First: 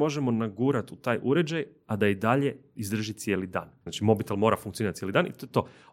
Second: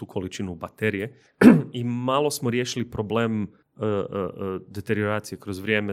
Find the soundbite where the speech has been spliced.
first; 1 cut; at 3.9 s

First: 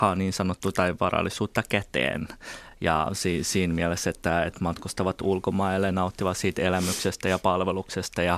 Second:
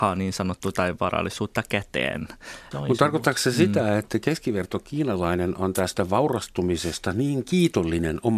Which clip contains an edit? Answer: second; 1 cut; at 2.7 s

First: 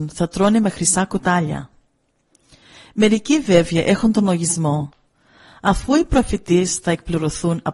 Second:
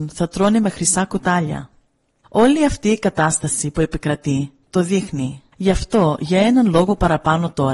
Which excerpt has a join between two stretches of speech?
second; 2 cuts; at 2.2 s, 5.5 s

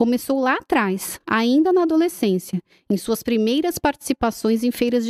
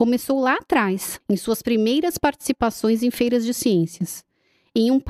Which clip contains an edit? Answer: second; 1 cut; at 1.2 s

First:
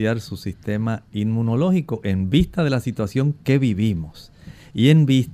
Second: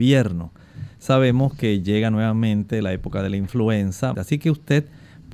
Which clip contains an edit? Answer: second; 1 cut; at 4.1 s

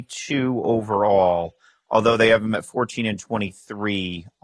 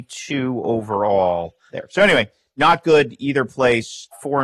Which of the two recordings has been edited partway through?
second; 1 cut; at 1.7 s

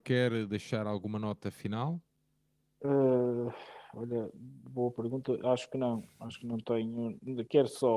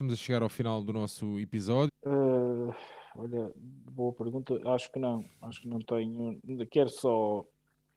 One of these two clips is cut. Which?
second; 1 cut; at 1.9 s

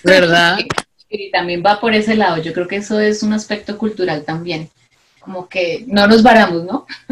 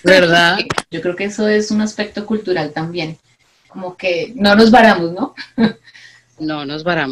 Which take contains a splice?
second; 1 cut; at 0.9 s

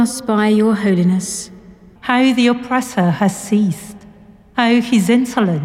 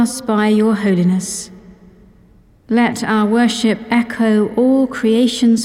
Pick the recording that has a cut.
first; 1 cut; at 2.0 s

